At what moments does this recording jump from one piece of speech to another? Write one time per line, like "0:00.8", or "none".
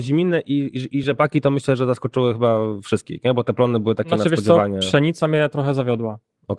none